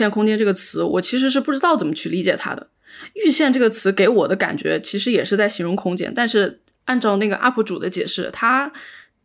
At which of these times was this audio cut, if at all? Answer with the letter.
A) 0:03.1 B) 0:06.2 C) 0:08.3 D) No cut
D